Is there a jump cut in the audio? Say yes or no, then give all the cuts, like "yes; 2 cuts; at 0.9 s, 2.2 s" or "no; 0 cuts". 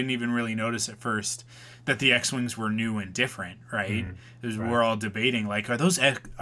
no; 0 cuts